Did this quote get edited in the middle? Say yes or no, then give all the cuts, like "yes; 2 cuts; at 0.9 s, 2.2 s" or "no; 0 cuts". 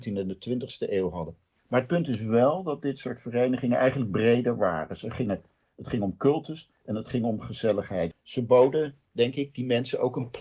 yes; 1 cut; at 8.1 s